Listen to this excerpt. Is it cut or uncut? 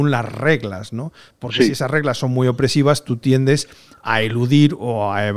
uncut